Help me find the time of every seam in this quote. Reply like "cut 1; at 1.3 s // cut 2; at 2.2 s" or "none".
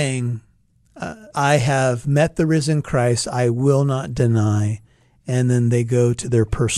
cut 1; at 1.3 s